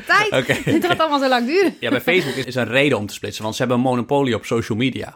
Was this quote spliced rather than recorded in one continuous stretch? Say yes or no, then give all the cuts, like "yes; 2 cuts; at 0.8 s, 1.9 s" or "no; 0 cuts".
yes; 1 cut; at 2.4 s